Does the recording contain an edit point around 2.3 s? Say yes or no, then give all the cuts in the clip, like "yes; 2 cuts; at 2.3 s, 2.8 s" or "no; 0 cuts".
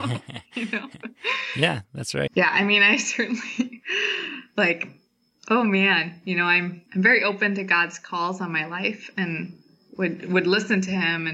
yes; 2 cuts; at 2.3 s, 6.9 s